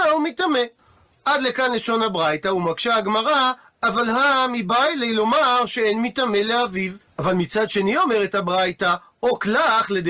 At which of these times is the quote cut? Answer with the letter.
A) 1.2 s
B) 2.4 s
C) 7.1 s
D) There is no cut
C